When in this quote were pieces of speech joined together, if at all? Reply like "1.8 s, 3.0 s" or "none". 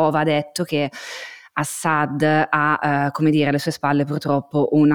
none